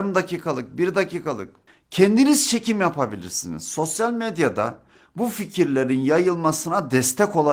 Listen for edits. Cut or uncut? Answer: uncut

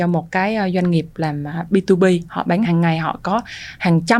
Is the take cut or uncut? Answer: cut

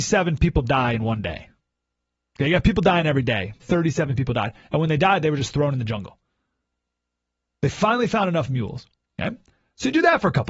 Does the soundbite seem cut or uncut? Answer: cut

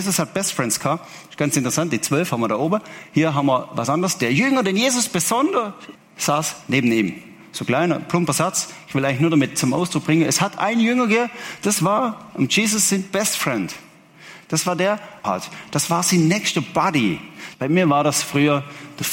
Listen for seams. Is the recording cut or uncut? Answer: cut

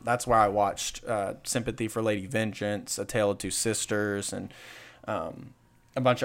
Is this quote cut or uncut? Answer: uncut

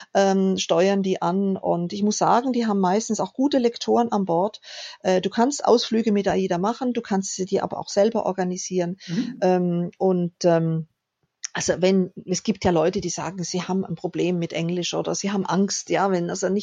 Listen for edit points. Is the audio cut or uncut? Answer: uncut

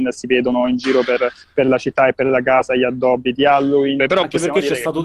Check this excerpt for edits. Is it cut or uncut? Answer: cut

